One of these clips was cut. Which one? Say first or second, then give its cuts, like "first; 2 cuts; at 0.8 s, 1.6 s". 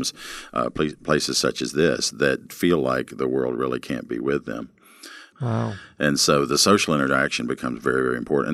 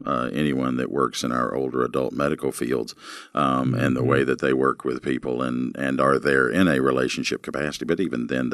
first; 1 cut; at 5.3 s